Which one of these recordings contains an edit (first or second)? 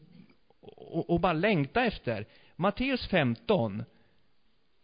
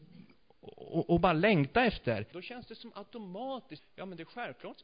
second